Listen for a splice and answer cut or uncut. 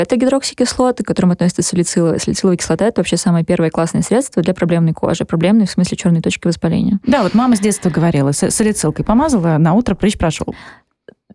uncut